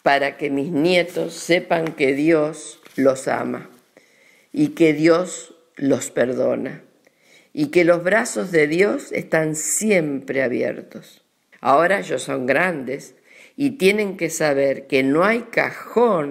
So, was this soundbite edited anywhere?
yes; 2 cuts; at 2.9 s, 11.5 s

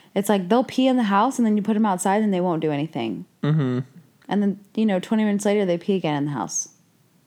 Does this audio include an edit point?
no; 0 cuts

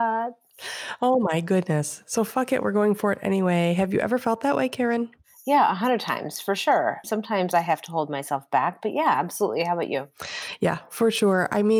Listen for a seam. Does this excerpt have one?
yes; 1 cut; at 7.0 s

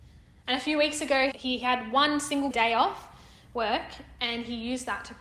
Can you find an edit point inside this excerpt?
yes; 2 cuts; at 1.3 s, 2.5 s

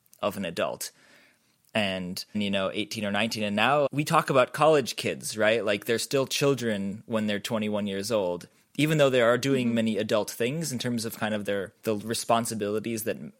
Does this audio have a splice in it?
yes; 2 cuts; at 2.3 s, 3.9 s

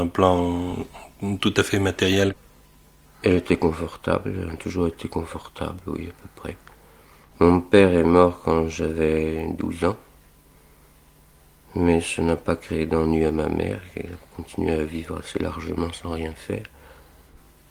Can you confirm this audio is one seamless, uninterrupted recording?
yes; 0 cuts

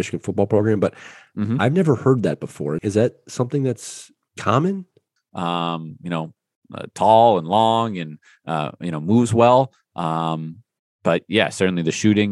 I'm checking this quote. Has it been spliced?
yes; 2 cuts; at 2.8 s, 5.2 s

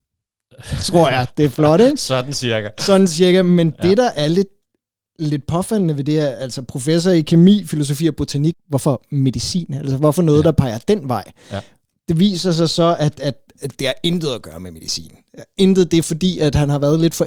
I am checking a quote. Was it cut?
yes; 1 cut; at 8.5 s

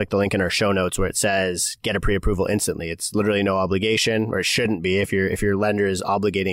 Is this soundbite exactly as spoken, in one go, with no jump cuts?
yes; 0 cuts

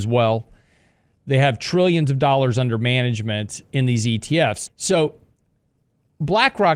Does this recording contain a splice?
yes; 1 cut; at 4.7 s

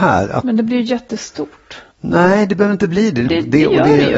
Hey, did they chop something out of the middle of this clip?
yes; 2 cuts; at 1.9 s, 3.3 s

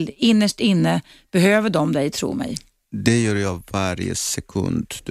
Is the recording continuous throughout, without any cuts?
yes; 0 cuts

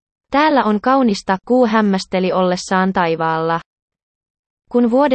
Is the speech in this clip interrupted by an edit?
no; 0 cuts

